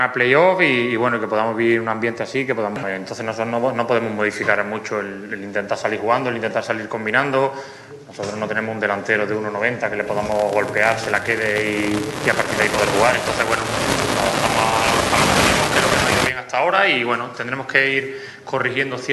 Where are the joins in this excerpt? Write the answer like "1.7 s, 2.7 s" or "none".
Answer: 2.8 s